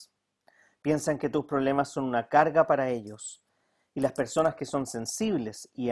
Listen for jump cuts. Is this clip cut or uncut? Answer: uncut